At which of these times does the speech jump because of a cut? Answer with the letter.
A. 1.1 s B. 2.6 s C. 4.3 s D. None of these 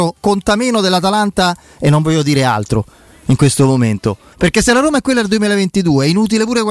C